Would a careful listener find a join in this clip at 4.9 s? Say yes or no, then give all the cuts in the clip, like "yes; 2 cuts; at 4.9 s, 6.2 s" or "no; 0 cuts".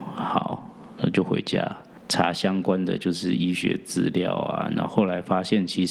yes; 1 cut; at 4.9 s